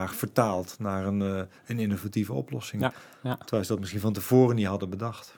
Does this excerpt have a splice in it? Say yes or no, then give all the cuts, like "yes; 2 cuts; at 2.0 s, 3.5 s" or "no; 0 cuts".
no; 0 cuts